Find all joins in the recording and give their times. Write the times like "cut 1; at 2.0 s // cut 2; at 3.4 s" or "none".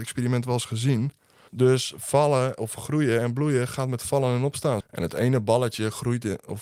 cut 1; at 1.5 s // cut 2; at 4.8 s